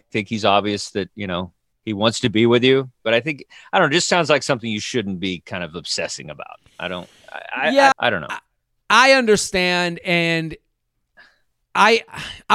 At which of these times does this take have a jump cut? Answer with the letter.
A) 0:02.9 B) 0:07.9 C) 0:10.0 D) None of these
B